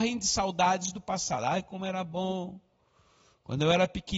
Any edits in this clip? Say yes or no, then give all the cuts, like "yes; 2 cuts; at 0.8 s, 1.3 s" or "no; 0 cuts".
no; 0 cuts